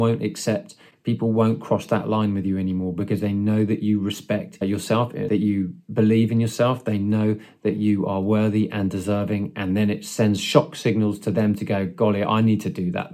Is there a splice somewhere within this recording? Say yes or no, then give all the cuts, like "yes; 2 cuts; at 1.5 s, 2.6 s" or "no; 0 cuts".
no; 0 cuts